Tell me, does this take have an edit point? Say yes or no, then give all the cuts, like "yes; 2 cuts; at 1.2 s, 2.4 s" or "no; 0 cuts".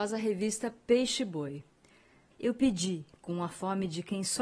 yes; 1 cut; at 2.3 s